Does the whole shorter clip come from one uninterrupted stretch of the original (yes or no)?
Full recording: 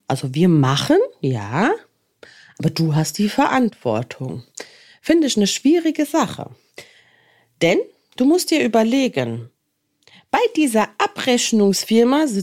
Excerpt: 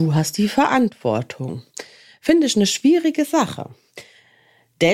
yes